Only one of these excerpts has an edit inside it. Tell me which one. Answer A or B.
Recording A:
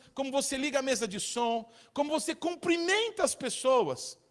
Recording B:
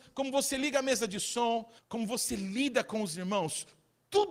B